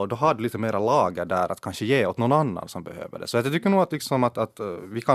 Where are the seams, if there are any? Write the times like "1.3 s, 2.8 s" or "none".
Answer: none